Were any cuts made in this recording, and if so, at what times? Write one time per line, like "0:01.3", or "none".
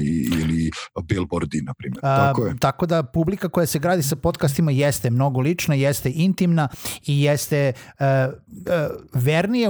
0:02.0
0:08.6